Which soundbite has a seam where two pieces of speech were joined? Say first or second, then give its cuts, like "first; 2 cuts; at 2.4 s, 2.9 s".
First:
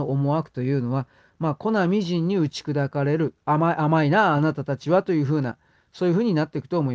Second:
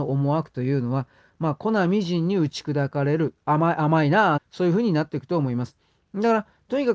second; 1 cut; at 4.4 s